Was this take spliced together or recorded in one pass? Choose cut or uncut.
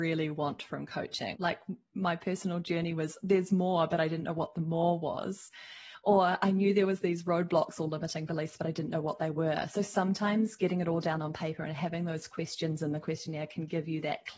cut